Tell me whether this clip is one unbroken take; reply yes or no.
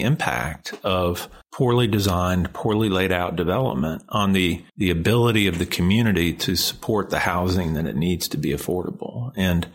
no